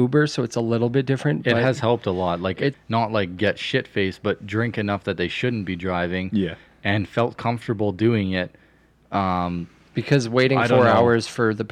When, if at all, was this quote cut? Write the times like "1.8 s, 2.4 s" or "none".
2.7 s